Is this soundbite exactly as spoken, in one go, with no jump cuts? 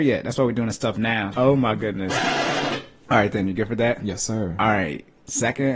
no; 1 cut; at 1.3 s

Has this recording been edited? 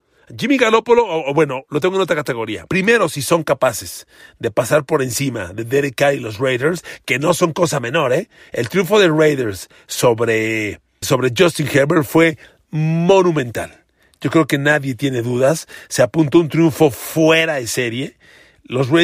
yes; 2 cuts; at 2.7 s, 11.0 s

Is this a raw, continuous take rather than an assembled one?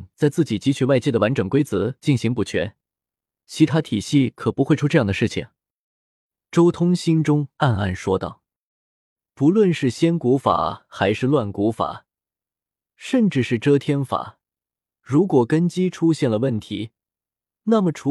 yes; 0 cuts

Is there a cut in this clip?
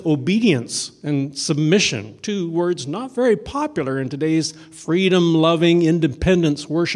no; 0 cuts

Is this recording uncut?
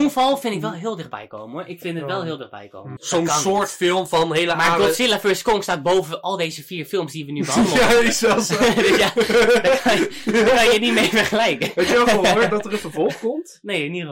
no; 1 cut; at 3.0 s

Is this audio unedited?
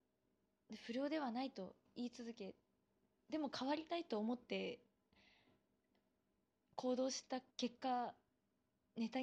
no; 1 cut; at 7.5 s

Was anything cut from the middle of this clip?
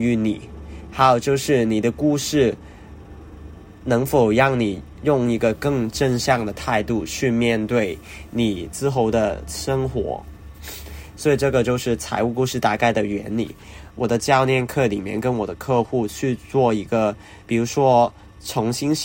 yes; 2 cuts; at 13.9 s, 17.4 s

